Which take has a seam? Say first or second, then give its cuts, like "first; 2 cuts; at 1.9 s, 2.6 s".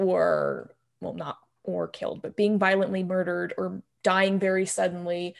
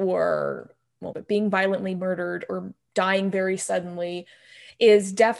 second; 1 cut; at 1.1 s